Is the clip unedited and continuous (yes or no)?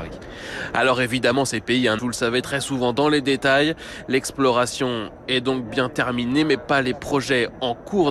no